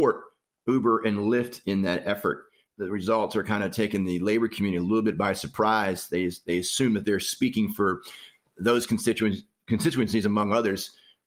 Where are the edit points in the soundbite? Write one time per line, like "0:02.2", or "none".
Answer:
none